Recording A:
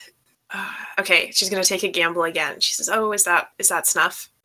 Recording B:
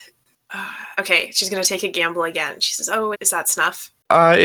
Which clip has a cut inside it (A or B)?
B